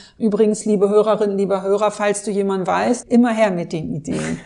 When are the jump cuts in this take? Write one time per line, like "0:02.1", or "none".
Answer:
0:03.0